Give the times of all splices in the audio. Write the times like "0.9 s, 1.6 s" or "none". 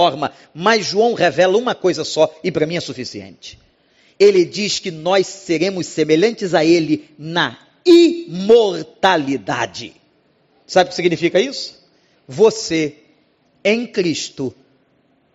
none